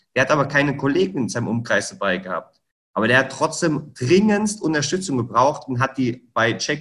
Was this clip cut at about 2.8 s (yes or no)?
no